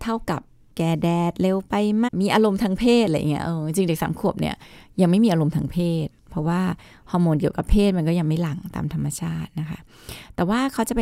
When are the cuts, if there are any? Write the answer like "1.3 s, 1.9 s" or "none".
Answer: 2.1 s